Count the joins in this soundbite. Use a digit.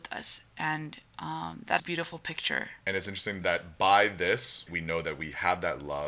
3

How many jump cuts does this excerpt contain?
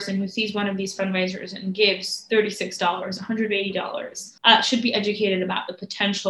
1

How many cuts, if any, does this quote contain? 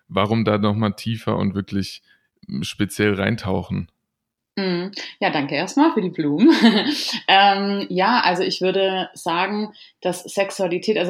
0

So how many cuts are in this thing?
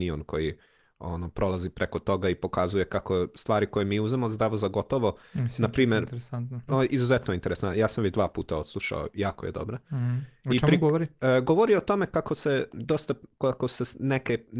1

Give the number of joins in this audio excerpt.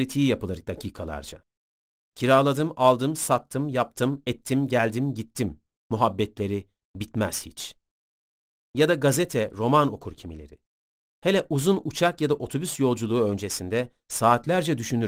0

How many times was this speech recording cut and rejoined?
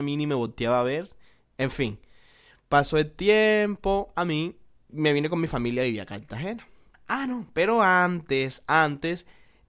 2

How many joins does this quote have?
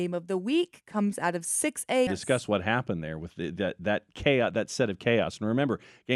1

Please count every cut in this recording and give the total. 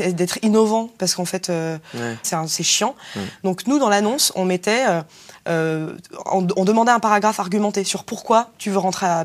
1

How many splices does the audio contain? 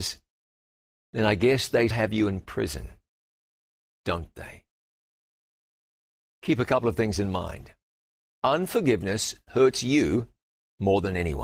1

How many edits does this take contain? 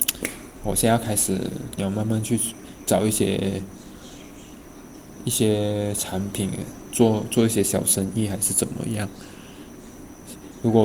1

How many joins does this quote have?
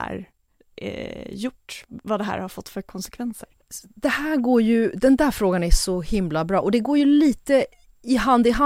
0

